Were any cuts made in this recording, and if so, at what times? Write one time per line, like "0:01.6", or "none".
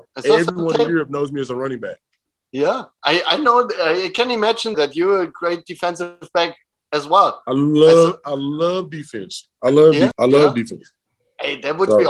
0:04.7
0:10.1

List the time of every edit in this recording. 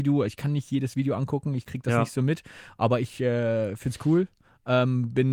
none

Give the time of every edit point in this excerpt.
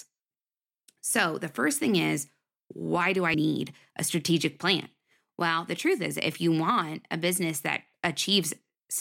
0:03.3

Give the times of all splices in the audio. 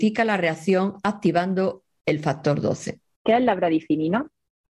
0:03.2

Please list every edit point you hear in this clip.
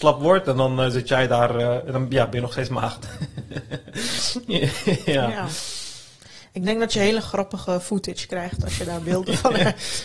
none

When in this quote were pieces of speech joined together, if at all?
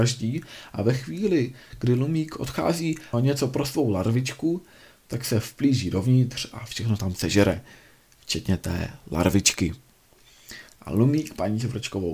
0:03.1
0:10.7

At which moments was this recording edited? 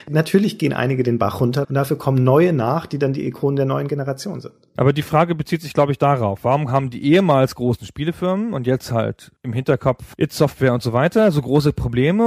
0:01.6

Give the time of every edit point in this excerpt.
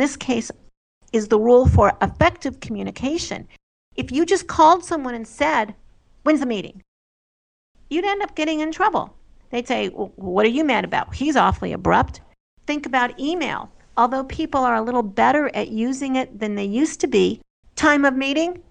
0:17.6

